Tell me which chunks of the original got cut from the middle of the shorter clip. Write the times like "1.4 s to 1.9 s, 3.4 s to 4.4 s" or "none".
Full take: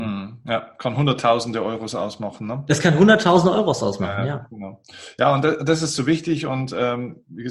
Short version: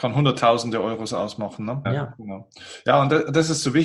2.7 s to 4.2 s